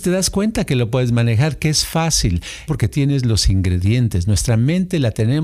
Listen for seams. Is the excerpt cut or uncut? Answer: cut